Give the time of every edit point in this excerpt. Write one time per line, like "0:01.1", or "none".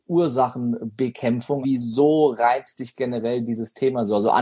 0:01.6